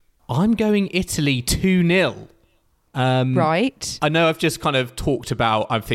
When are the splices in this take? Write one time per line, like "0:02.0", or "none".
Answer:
0:02.9